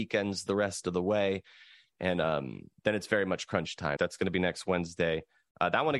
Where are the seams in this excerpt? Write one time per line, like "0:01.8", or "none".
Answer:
0:04.0